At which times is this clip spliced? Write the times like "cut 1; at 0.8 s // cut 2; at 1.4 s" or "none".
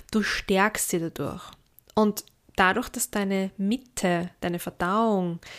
none